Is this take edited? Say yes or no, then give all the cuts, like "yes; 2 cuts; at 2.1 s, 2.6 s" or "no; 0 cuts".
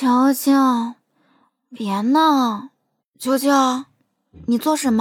yes; 1 cut; at 3.0 s